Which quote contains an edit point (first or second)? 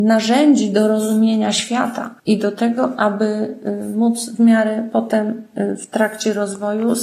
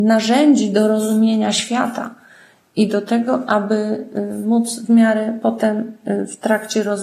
first